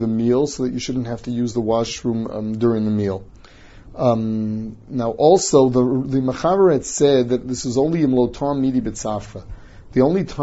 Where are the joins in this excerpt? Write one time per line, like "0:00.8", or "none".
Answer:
none